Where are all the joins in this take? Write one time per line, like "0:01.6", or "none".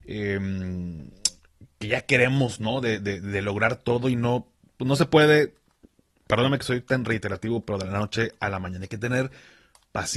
none

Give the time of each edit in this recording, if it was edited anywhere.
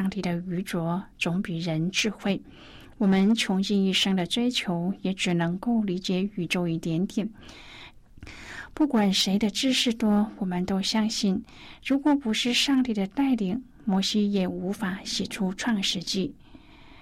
0:07.9

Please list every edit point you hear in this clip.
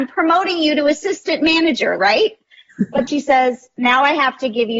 0:02.0
0:03.1

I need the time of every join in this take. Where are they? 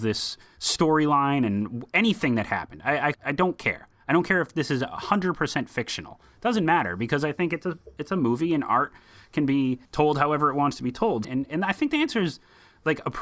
0:03.1
0:09.9
0:11.2

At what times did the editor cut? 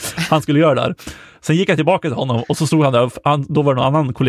none

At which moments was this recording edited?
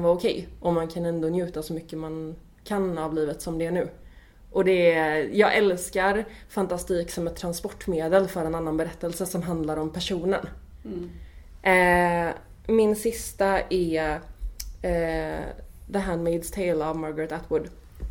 none

